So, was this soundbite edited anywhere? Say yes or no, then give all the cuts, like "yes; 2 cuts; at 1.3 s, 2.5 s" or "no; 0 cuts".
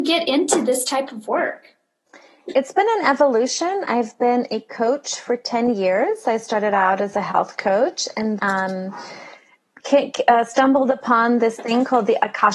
yes; 1 cut; at 8.4 s